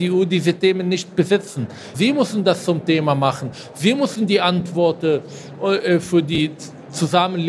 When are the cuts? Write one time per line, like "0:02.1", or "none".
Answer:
0:01.9